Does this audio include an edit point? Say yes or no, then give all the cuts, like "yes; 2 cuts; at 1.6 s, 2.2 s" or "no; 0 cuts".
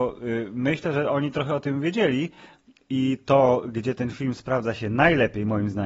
no; 0 cuts